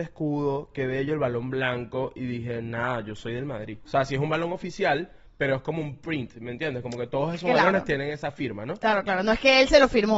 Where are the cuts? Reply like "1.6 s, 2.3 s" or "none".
3.9 s